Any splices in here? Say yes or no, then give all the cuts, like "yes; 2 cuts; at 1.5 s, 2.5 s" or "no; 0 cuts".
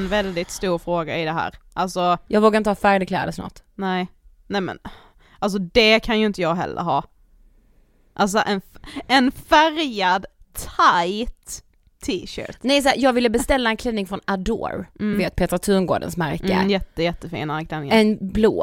no; 0 cuts